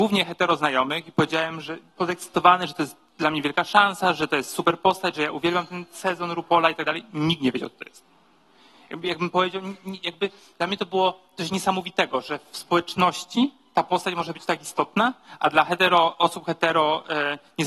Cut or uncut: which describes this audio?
uncut